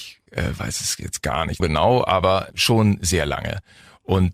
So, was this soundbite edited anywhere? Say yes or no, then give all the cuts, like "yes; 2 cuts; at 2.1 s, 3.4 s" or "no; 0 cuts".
yes; 1 cut; at 1.6 s